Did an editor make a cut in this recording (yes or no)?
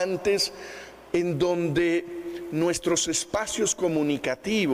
no